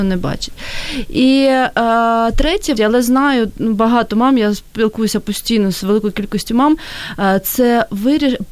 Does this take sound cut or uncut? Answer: cut